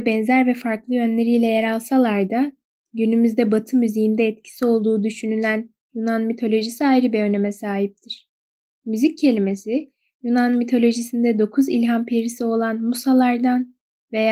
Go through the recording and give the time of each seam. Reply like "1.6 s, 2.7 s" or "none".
8.7 s